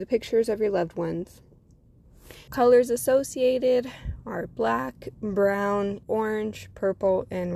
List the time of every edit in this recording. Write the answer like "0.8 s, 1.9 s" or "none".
2.5 s, 6.0 s